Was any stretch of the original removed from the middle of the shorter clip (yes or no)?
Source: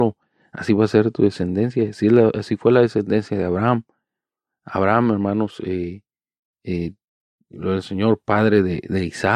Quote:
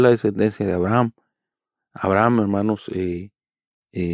no